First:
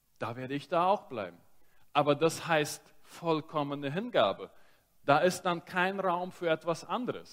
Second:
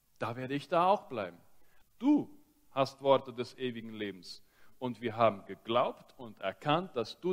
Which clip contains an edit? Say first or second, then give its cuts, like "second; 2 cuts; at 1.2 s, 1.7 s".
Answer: second; 1 cut; at 1.8 s